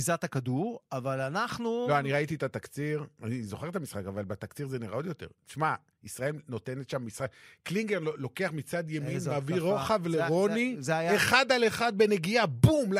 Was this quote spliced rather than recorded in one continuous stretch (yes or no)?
no